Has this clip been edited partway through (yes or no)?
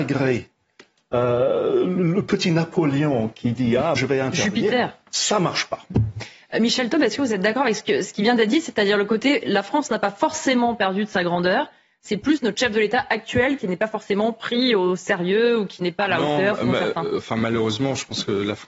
yes